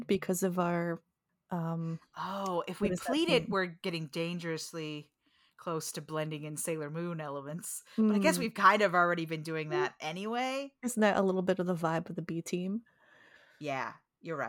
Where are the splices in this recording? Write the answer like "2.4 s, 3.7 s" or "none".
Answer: none